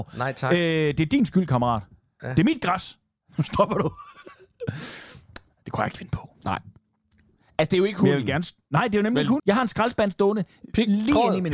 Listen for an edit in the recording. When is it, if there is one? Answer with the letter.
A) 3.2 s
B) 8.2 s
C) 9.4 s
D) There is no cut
C